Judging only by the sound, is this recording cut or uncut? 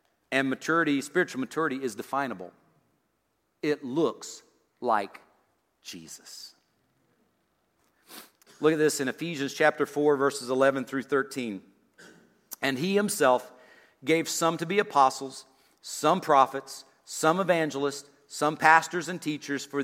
uncut